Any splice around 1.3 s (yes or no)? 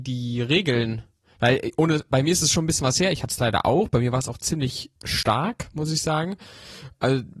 no